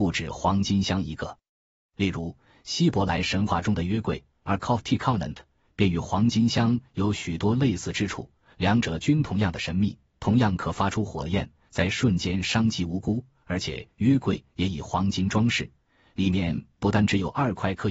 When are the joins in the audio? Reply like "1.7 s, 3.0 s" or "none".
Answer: none